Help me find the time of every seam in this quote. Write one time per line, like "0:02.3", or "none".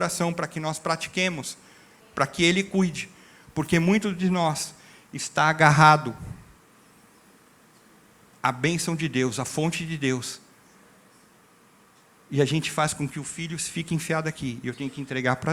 0:02.0